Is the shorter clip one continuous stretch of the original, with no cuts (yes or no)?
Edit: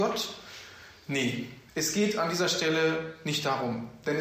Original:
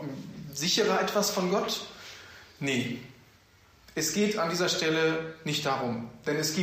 no